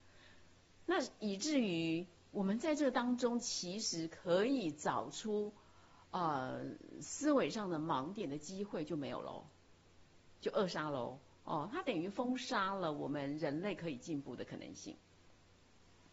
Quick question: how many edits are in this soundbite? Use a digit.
0